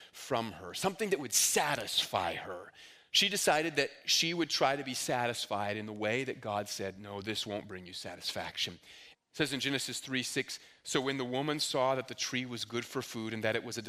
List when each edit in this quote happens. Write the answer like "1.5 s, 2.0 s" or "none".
9.1 s